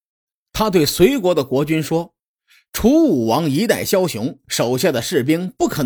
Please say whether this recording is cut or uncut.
uncut